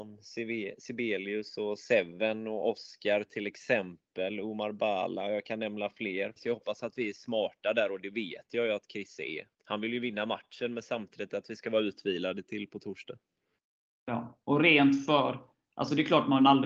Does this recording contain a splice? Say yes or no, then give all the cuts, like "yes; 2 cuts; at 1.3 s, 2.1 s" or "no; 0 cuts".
yes; 2 cuts; at 6.4 s, 9.5 s